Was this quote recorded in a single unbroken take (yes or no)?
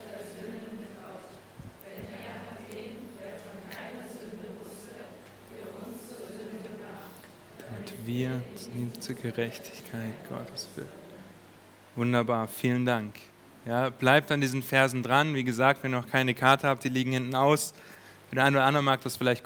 yes